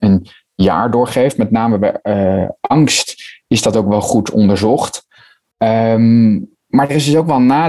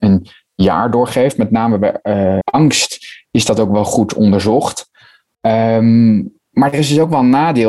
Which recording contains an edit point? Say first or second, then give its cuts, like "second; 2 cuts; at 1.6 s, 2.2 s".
second; 1 cut; at 2.4 s